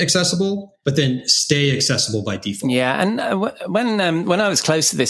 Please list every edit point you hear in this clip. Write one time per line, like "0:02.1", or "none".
none